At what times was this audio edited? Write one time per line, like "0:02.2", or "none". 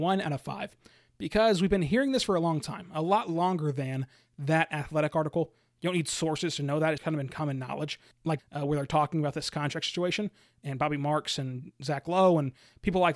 0:07.0
0:08.4